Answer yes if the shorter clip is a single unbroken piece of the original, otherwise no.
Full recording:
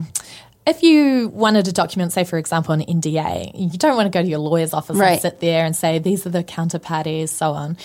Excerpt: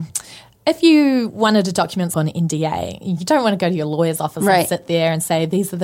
no